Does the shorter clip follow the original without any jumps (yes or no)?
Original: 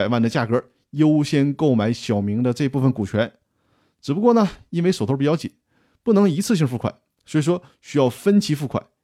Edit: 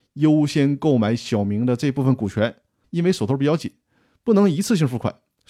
no